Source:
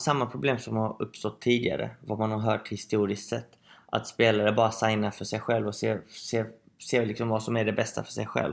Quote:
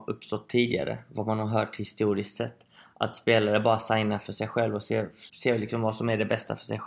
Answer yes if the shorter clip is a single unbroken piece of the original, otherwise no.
no